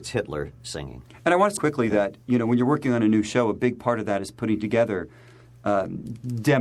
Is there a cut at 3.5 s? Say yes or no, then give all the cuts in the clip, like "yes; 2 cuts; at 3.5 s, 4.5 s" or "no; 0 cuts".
no; 1 cut; at 1.6 s